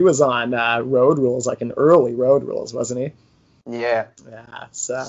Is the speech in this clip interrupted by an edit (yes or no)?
yes